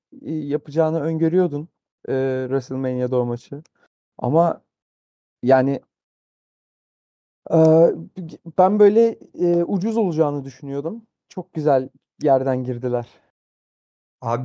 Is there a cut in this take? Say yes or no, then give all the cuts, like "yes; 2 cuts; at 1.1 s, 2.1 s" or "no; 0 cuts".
no; 0 cuts